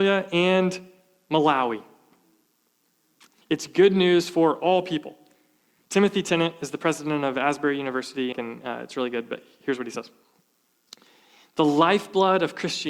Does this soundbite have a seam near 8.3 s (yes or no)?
yes